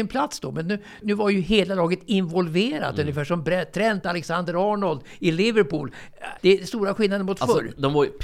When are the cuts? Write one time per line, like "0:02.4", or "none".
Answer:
0:01.0
0:06.4